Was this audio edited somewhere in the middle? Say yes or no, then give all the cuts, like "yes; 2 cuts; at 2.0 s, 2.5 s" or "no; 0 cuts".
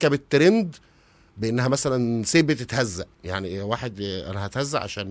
yes; 1 cut; at 3.1 s